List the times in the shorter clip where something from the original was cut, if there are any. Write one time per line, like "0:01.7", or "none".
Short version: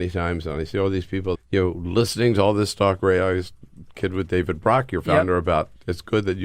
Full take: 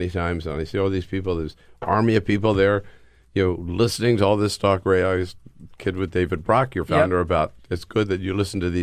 0:01.3